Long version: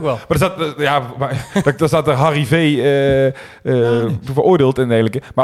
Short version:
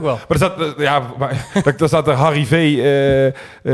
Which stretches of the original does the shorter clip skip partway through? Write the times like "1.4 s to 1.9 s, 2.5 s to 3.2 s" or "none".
none